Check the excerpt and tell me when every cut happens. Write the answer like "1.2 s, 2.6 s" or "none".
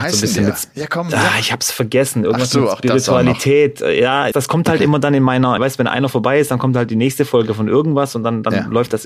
4.3 s, 5.6 s